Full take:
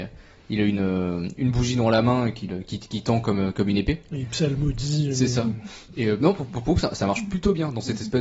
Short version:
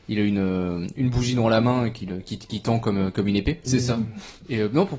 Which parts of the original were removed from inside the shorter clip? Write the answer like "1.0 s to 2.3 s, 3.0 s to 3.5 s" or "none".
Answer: 4.1 s to 5.1 s